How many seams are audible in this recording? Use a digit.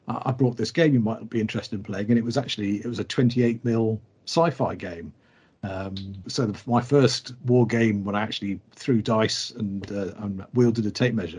1